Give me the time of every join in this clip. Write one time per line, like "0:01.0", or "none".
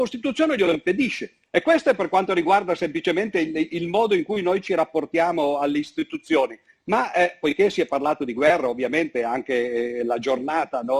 0:01.5